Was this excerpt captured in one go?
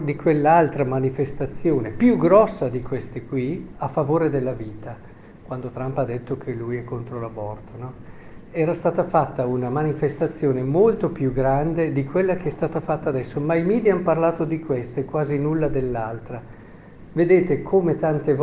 no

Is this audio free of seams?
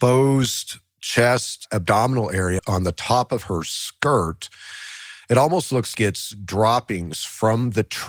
no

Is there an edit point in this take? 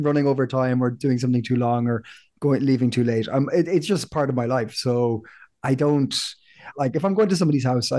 yes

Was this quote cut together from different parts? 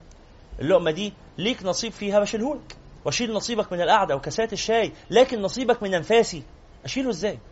yes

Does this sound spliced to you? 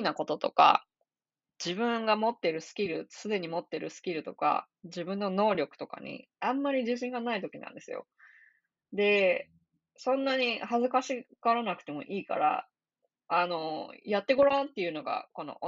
no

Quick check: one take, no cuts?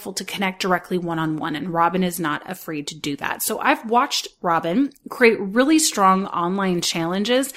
yes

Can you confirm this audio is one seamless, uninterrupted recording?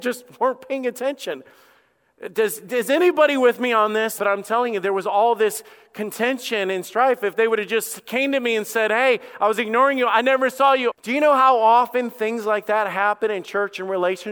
no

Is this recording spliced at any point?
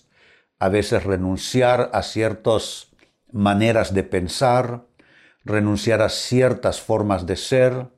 no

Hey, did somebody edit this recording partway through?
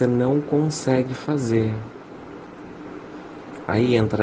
no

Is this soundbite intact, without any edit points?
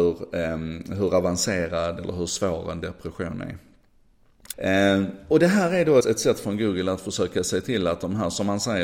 no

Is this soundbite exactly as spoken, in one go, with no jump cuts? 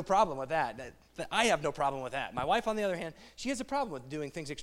yes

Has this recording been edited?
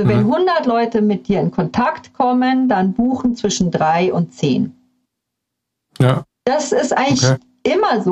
no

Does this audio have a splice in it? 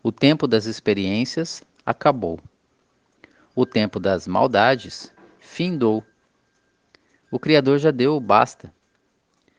no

